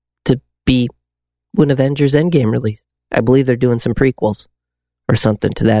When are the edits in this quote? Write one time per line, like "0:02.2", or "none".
0:01.4
0:03.0